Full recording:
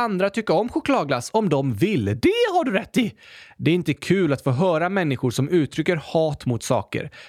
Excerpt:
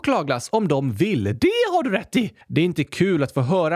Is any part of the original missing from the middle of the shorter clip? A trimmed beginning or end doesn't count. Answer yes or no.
yes